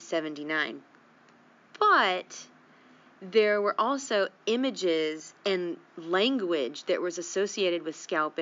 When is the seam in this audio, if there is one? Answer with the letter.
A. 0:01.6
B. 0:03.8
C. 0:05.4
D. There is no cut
C